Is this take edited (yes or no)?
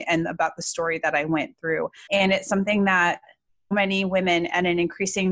yes